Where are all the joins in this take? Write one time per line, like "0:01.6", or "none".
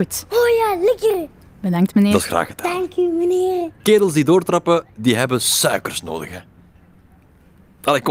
none